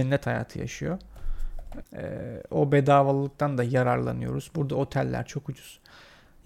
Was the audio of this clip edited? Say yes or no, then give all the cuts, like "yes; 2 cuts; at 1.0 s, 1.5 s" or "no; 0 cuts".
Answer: yes; 1 cut; at 1.8 s